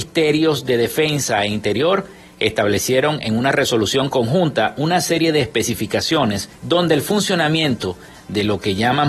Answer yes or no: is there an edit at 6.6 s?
yes